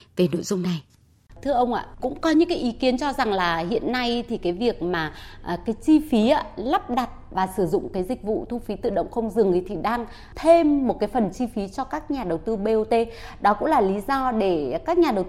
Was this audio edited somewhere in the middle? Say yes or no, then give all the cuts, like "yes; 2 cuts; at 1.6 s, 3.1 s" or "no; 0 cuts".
no; 0 cuts